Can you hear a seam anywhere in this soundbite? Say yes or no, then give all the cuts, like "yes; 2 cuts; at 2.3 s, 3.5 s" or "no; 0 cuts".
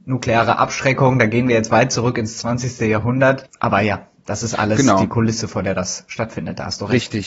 no; 0 cuts